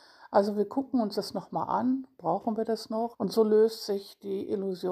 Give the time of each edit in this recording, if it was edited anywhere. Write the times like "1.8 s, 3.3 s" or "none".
3.1 s